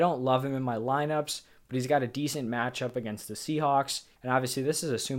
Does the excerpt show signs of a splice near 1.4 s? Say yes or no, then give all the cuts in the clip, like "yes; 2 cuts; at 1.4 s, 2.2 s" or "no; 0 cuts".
no; 1 cut; at 4.2 s